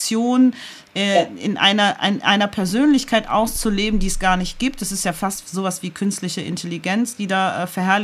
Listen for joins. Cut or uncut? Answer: uncut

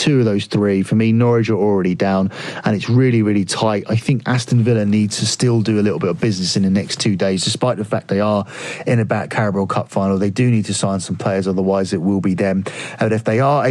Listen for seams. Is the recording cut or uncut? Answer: uncut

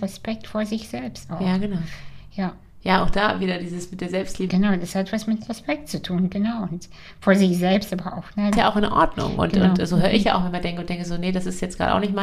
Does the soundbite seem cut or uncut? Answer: cut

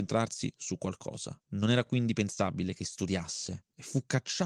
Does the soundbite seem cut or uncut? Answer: uncut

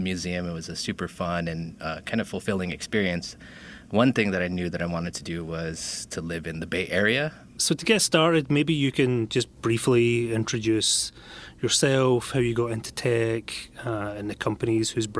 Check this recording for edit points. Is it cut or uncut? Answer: cut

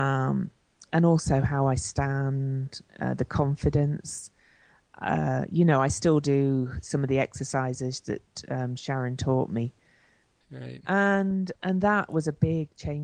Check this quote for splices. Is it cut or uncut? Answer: cut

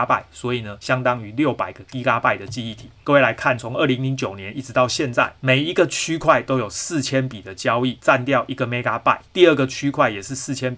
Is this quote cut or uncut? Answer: uncut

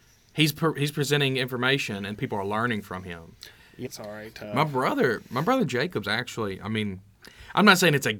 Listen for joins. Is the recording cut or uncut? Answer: cut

